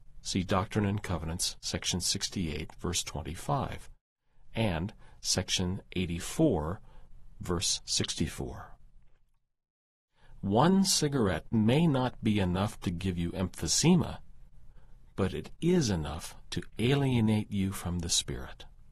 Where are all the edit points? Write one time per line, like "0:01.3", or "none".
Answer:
none